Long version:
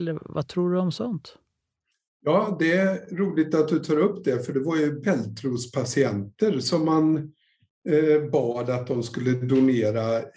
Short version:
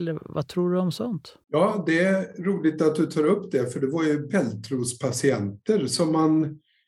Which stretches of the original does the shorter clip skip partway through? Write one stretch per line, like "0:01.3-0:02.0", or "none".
0:01.4-0:02.2

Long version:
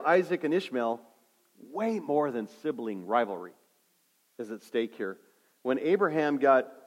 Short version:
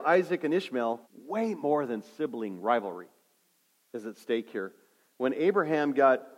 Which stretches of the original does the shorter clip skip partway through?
0:01.0-0:01.5

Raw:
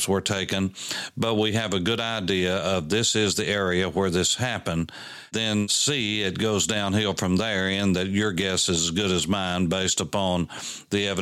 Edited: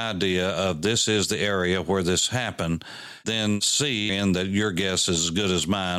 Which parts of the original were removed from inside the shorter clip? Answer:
0:06.2-0:07.7

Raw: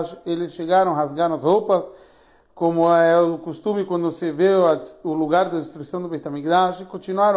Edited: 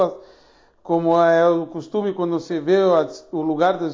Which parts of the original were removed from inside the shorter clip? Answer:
none

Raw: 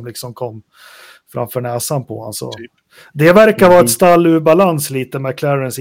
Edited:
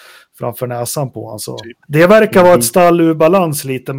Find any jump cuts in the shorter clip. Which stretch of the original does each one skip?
0:02.8-0:03.1

